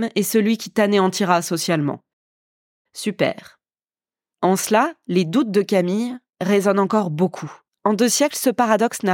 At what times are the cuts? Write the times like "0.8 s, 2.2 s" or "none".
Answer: 4.3 s, 7.7 s